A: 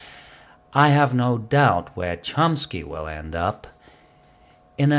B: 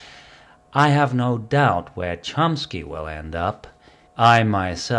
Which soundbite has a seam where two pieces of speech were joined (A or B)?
B